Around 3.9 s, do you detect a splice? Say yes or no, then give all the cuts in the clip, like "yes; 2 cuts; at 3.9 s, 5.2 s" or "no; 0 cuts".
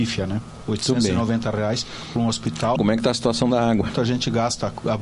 yes; 2 cuts; at 2.8 s, 3.9 s